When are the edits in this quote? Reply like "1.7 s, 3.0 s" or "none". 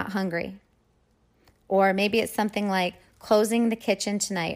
none